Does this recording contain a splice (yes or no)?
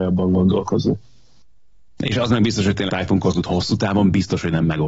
yes